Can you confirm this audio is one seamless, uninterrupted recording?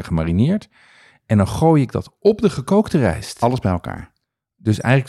yes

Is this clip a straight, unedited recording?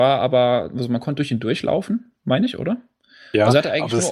yes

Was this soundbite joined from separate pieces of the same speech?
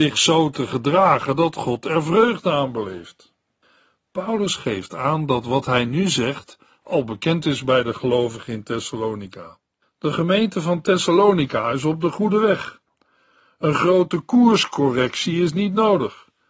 yes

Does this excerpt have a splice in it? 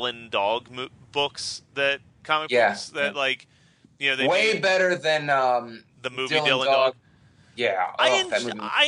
no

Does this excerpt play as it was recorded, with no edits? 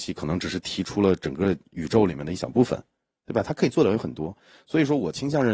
yes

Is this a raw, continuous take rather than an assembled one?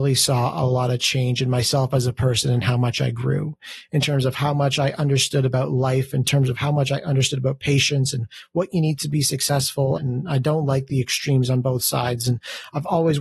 no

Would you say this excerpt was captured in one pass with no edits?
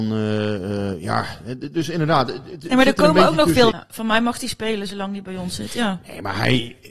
no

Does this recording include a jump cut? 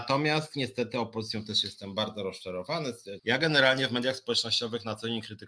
yes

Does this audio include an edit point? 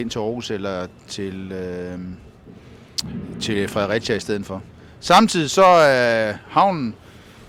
no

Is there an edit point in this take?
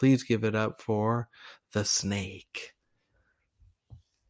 no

